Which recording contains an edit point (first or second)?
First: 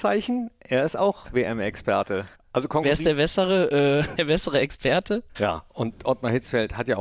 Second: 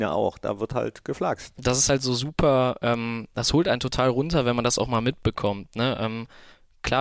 first